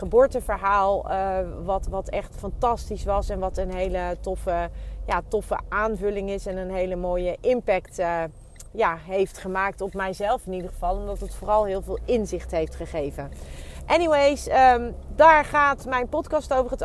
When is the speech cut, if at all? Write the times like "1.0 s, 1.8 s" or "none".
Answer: none